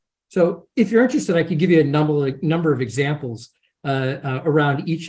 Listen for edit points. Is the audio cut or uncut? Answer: uncut